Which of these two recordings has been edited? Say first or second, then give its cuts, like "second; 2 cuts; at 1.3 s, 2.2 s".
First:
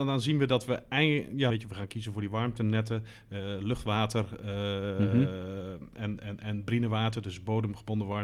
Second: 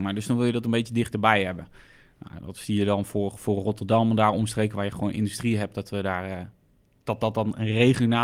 first; 1 cut; at 1.5 s